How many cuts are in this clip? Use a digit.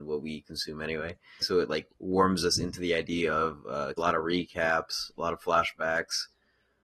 2